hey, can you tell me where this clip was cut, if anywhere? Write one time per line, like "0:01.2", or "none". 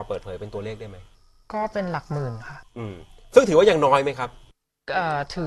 none